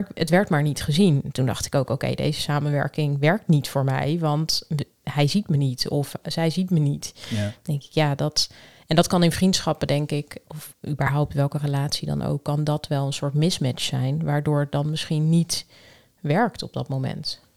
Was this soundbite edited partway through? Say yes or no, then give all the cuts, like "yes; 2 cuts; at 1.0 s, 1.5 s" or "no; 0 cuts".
no; 0 cuts